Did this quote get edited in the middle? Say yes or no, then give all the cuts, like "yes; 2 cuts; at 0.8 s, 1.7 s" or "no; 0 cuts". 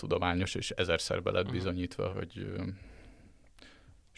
yes; 1 cut; at 2.1 s